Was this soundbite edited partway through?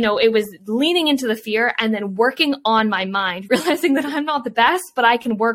yes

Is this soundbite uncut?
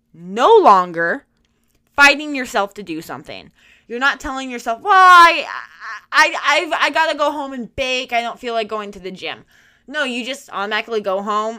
yes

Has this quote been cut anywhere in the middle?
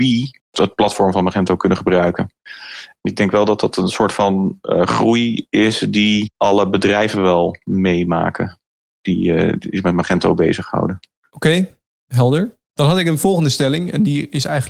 no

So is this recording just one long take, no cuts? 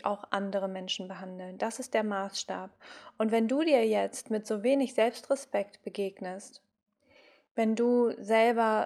yes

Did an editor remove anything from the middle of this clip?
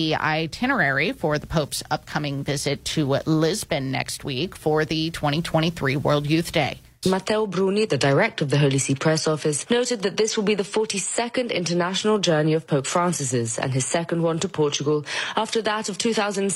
yes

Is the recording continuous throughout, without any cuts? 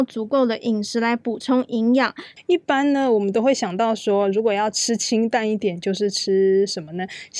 no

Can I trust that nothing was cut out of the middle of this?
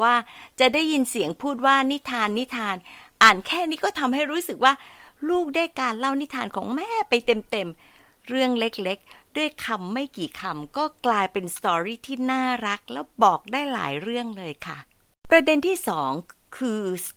yes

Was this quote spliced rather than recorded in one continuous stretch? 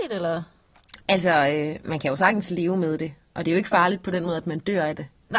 no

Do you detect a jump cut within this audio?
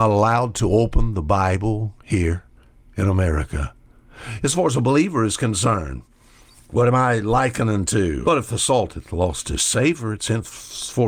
yes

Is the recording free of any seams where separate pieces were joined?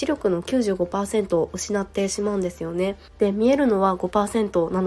no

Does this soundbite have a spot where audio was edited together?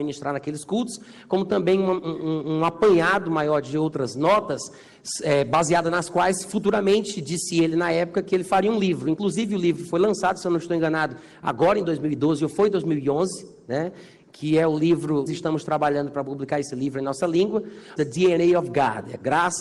yes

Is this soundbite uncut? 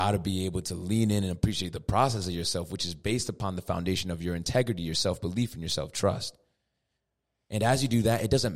yes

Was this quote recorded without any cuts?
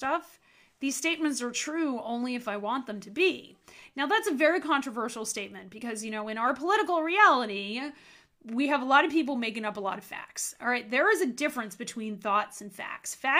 yes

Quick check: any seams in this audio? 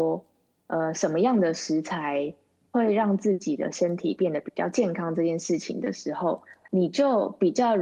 no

